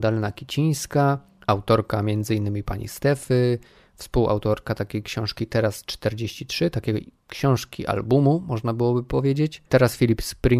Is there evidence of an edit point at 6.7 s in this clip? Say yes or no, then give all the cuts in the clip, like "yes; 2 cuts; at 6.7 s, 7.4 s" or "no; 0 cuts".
no; 1 cut; at 9.7 s